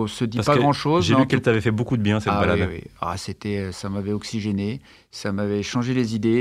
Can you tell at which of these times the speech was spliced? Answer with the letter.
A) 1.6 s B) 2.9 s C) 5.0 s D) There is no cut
D